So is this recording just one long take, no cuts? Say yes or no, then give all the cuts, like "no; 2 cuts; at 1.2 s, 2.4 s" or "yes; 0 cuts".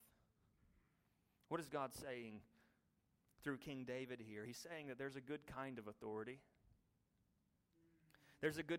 yes; 0 cuts